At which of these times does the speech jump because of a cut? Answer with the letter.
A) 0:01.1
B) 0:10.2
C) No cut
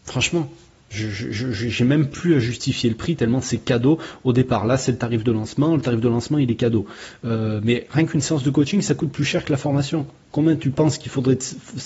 C